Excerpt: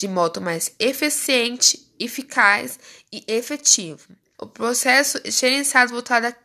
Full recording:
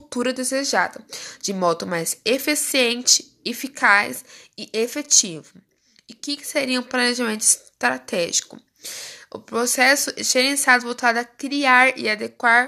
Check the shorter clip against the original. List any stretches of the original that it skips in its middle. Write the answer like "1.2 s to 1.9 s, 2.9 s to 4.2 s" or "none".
5.8 s to 9.3 s